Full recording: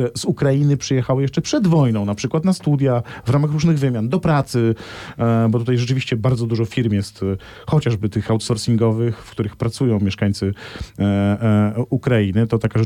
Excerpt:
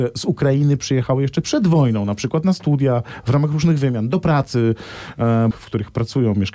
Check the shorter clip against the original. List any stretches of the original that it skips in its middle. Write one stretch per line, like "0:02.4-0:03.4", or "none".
0:05.5-0:09.2